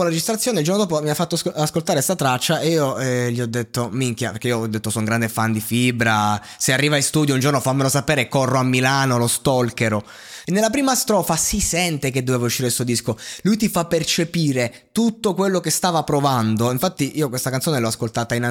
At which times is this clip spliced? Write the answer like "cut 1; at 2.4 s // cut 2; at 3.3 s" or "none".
cut 1; at 10.4 s